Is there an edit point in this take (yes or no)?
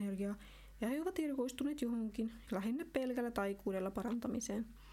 yes